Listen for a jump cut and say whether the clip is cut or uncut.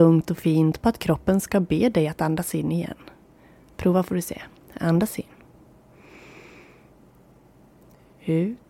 uncut